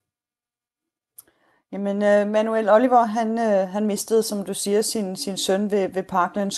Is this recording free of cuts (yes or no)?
yes